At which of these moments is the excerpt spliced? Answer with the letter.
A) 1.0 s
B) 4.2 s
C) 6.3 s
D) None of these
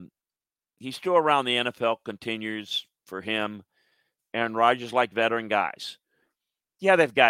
B